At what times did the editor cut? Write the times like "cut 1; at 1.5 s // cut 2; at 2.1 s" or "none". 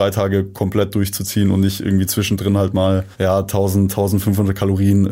cut 1; at 3.1 s